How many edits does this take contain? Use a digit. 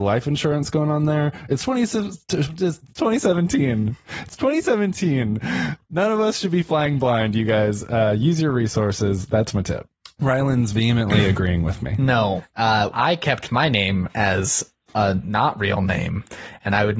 1